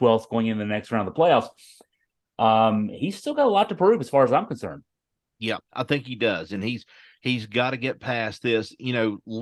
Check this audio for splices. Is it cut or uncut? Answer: uncut